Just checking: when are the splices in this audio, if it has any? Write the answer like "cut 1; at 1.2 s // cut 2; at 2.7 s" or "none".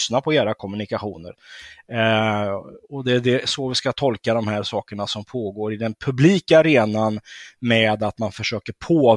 none

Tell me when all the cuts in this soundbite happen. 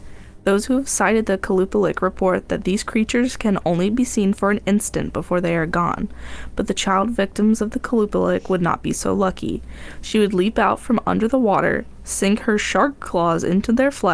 none

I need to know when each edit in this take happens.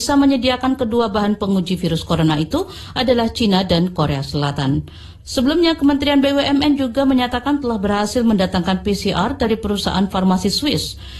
cut 1; at 5.2 s

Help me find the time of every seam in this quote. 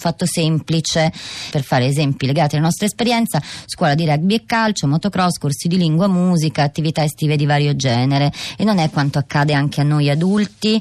cut 1; at 1.5 s

